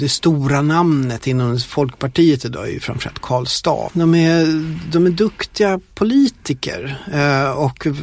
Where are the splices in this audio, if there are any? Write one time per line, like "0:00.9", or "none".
0:03.9